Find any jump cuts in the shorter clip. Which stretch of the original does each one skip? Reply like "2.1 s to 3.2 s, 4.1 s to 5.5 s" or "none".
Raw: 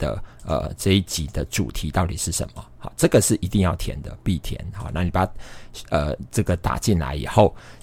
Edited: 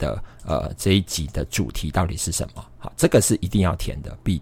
none